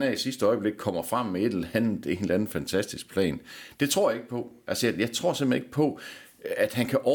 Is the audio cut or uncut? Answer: uncut